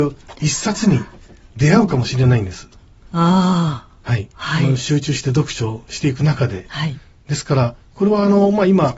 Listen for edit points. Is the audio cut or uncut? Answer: uncut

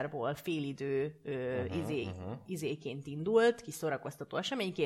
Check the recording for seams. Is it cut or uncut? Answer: uncut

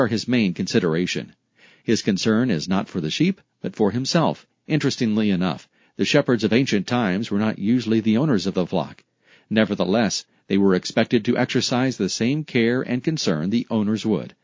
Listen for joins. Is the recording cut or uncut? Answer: uncut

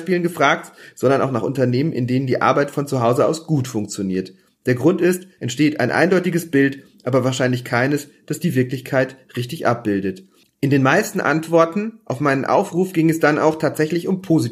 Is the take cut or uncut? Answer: cut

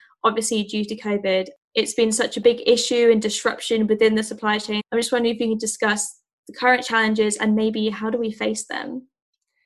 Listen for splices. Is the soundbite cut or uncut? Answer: cut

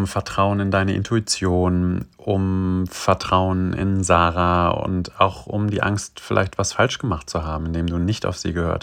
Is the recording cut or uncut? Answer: uncut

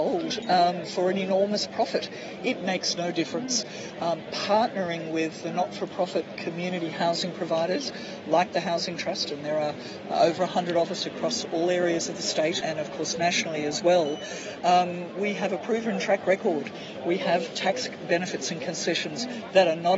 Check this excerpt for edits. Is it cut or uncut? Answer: cut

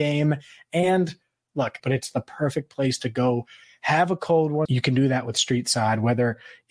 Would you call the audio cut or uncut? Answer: cut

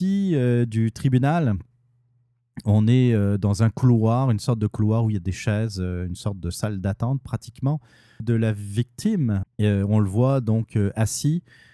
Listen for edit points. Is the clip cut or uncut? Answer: cut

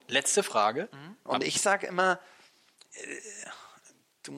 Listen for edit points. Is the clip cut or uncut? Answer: cut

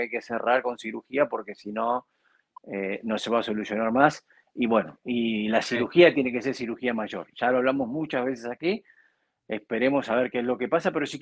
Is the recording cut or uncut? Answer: uncut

